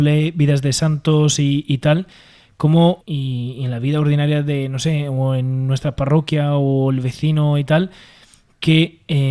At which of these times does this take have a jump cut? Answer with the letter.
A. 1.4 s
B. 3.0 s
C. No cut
B